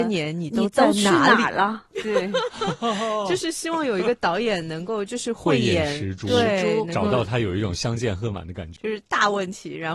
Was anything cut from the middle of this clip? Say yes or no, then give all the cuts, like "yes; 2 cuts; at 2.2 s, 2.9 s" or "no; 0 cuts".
yes; 1 cut; at 8.8 s